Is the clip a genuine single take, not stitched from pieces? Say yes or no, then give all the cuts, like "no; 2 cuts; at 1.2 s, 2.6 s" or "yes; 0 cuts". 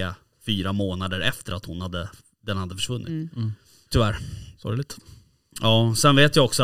no; 1 cut; at 3.9 s